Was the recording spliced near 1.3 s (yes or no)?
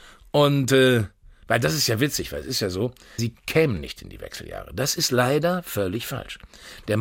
no